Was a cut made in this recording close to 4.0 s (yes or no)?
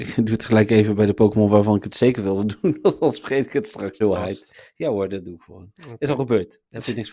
yes